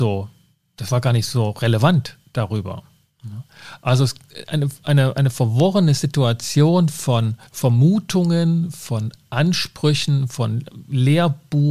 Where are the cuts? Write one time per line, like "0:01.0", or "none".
0:07.5